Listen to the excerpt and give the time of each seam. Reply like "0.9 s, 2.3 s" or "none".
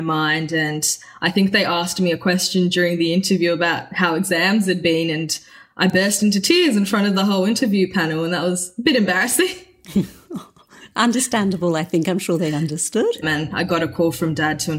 13.2 s